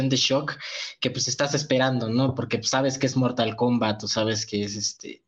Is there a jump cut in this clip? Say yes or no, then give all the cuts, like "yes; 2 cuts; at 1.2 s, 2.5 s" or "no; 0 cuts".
no; 0 cuts